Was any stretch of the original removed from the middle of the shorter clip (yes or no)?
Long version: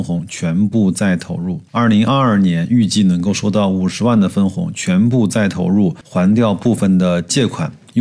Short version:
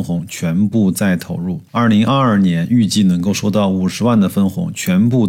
no